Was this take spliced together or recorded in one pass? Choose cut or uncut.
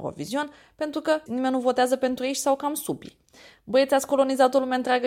cut